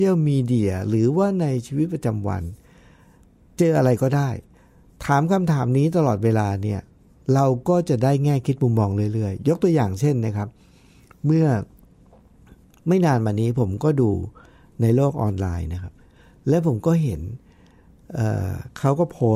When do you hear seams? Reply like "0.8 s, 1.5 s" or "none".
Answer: none